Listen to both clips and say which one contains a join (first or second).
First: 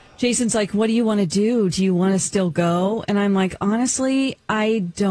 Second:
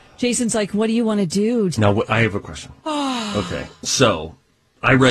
second